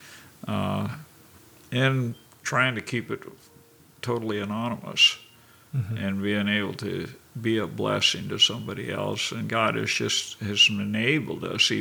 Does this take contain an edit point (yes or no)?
no